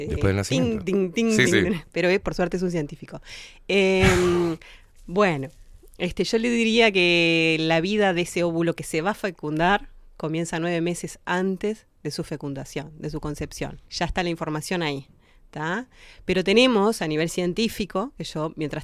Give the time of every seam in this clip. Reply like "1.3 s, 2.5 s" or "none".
1.4 s, 13.8 s